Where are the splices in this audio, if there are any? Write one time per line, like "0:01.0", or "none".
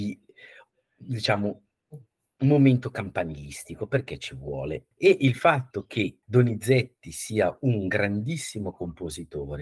0:04.9
0:06.2